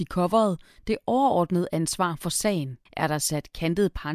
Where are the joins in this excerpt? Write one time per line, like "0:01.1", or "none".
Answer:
0:02.9